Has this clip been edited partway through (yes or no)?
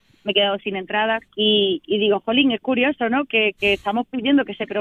yes